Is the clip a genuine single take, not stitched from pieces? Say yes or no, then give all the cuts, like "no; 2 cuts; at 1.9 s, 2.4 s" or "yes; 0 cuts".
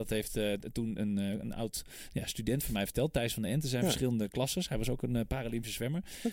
yes; 0 cuts